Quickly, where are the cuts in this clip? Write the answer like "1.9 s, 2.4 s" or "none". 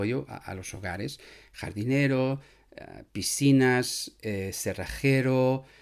none